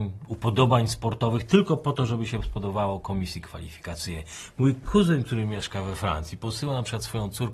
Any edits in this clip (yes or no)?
no